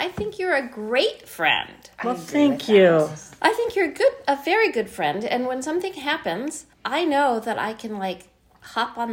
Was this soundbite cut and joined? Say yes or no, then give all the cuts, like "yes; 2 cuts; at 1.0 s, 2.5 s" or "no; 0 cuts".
yes; 1 cut; at 6.7 s